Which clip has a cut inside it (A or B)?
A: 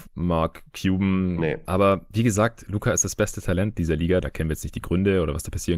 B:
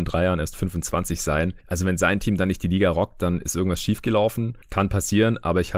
A